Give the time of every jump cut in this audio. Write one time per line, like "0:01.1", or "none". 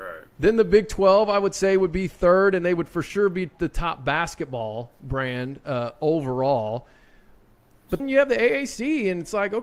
0:08.0